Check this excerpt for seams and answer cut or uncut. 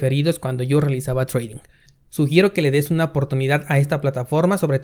uncut